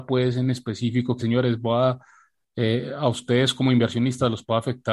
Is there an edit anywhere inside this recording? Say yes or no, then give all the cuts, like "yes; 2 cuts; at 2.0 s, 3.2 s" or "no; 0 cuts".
yes; 1 cut; at 1.2 s